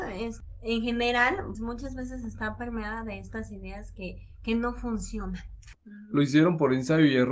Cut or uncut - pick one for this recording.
cut